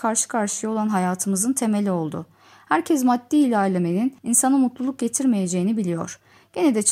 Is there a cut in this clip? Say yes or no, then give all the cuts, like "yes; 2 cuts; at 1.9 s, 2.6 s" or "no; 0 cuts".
no; 0 cuts